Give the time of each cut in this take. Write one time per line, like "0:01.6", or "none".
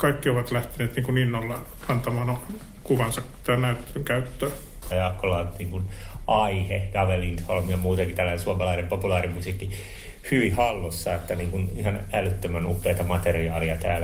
0:04.9